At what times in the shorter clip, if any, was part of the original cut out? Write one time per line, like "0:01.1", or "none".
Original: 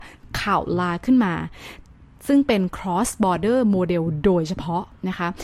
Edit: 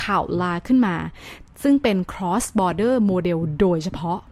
0:01.5